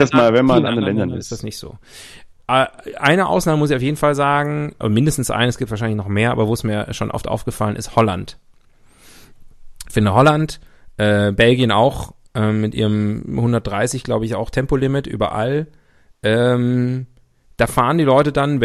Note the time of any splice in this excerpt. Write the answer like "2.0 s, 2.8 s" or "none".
4.8 s